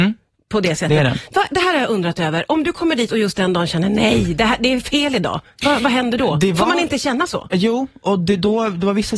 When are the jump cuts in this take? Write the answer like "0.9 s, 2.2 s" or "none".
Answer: none